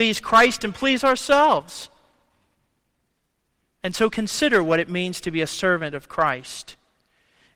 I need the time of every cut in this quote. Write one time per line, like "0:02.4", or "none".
0:03.8

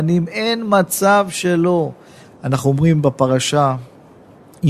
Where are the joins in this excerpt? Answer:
0:02.2

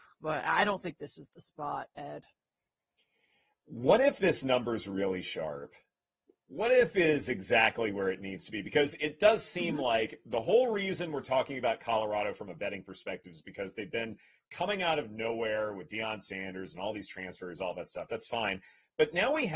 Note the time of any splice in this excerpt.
none

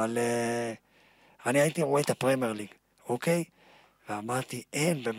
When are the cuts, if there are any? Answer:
0:02.9

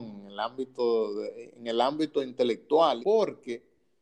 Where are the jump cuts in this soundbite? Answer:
0:03.0

